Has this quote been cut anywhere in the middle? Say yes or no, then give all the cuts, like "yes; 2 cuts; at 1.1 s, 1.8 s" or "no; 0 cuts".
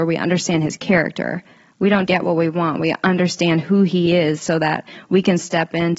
yes; 1 cut; at 2.1 s